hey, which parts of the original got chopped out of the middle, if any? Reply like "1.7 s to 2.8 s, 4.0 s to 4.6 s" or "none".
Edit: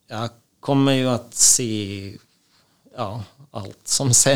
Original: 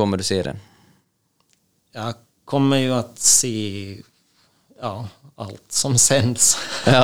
none